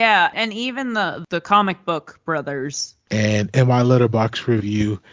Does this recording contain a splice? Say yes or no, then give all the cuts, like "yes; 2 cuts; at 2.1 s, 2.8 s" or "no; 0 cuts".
yes; 1 cut; at 3.1 s